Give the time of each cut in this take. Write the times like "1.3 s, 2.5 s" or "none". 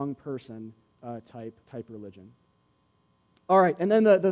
1.6 s